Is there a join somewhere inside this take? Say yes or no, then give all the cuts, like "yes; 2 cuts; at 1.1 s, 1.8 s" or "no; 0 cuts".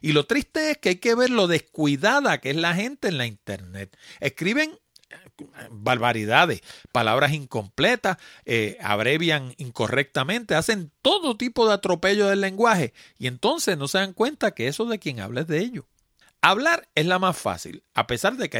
yes; 1 cut; at 16.2 s